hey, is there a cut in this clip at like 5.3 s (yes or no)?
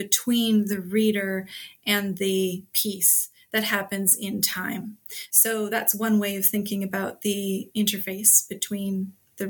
yes